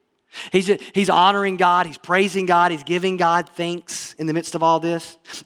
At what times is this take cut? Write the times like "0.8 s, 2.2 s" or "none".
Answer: none